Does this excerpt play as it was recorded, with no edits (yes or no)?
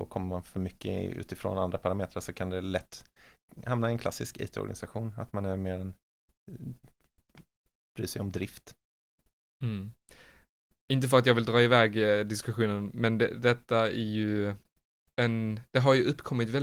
yes